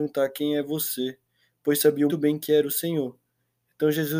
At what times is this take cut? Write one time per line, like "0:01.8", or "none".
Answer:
0:02.1